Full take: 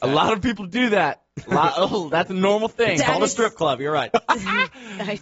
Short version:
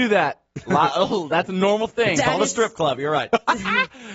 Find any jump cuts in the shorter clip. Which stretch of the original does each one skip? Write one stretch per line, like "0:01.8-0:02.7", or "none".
none